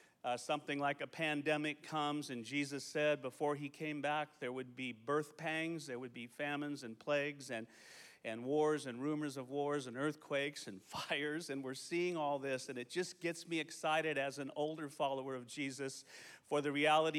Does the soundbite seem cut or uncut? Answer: uncut